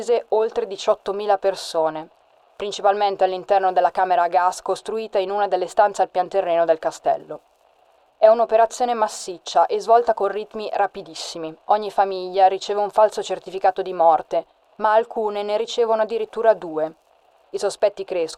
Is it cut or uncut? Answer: uncut